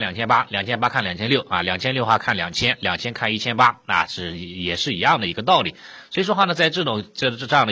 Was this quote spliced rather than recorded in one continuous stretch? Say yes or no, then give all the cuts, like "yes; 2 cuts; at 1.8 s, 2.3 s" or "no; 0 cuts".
no; 0 cuts